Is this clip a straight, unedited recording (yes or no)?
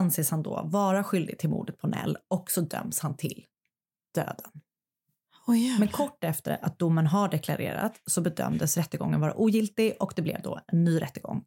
yes